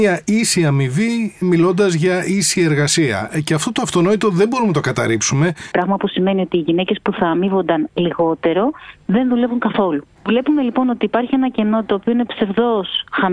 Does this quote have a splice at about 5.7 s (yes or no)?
yes